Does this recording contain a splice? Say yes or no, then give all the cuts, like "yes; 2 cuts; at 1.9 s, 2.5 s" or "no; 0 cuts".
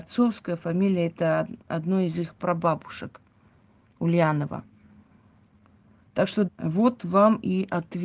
yes; 1 cut; at 6.5 s